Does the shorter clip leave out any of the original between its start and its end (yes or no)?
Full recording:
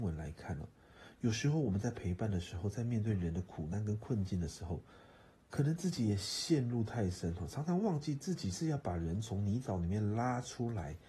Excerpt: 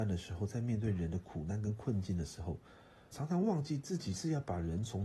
yes